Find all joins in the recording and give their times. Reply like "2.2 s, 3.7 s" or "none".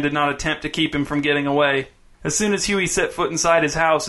2.1 s